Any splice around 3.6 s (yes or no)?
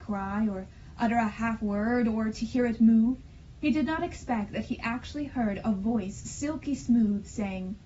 no